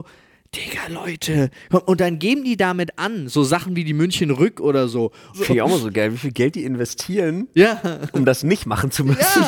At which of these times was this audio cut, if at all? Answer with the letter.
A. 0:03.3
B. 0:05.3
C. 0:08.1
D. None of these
B